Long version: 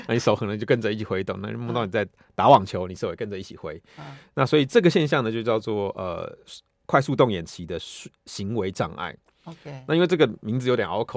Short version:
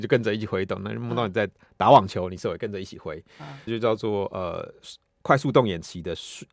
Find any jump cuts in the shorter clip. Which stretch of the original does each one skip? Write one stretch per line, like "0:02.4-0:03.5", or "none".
0:04.3-0:05.3